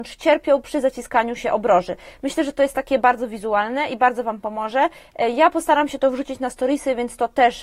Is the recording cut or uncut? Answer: uncut